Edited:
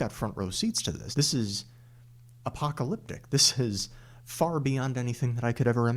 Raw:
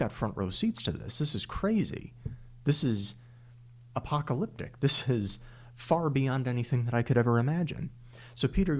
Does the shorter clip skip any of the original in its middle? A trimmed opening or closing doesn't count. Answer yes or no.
yes